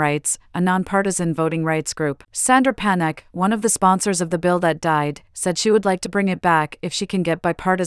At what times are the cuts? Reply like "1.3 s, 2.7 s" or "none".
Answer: 2.2 s